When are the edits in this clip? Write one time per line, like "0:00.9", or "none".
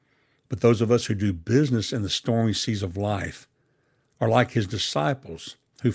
none